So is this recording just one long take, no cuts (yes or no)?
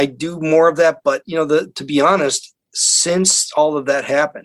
yes